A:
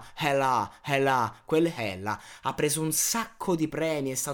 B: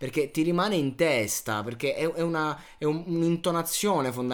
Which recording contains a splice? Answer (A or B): A